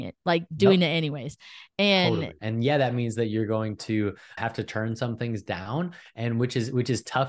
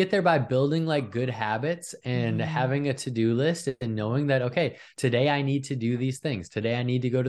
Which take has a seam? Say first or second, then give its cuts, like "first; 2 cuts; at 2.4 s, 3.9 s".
first; 2 cuts; at 2.4 s, 4.4 s